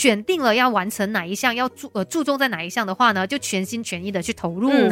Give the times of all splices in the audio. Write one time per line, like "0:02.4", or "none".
none